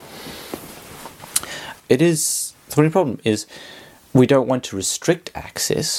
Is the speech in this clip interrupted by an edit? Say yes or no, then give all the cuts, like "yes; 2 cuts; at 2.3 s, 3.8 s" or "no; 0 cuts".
yes; 1 cut; at 1.8 s